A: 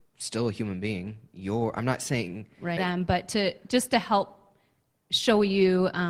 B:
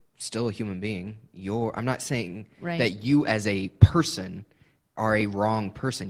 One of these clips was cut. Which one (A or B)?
A